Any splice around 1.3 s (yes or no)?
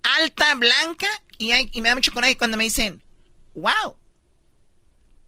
yes